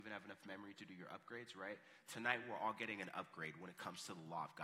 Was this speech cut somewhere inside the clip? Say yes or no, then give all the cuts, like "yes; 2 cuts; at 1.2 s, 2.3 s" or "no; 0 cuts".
no; 0 cuts